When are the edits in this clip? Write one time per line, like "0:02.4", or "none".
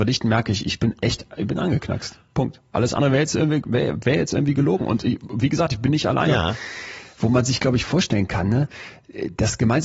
0:02.7
0:06.3